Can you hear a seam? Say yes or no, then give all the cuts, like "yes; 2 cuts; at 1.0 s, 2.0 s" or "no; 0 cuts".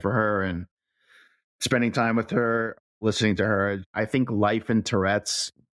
no; 0 cuts